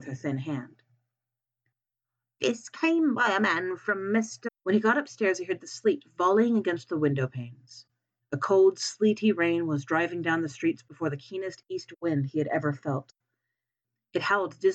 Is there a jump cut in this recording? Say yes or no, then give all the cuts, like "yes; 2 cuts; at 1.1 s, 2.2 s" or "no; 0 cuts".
yes; 2 cuts; at 4.5 s, 8.2 s